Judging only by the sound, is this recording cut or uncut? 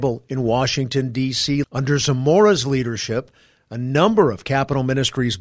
cut